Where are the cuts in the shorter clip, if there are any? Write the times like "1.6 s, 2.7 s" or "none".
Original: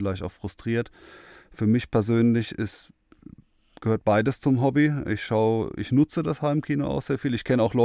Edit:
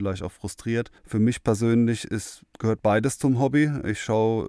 1.0 s, 2.5 s